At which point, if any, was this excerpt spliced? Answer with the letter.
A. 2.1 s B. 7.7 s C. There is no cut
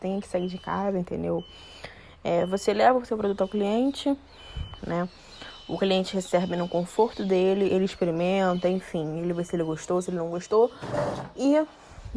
C